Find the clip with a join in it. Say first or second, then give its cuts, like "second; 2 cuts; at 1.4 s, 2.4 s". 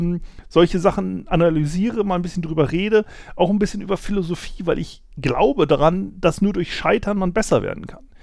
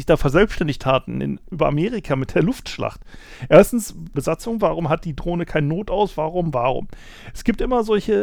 second; 2 cuts; at 4.2 s, 6.5 s